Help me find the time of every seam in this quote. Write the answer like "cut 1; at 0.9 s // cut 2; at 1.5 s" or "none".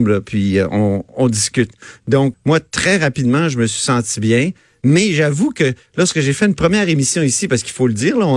cut 1; at 2.3 s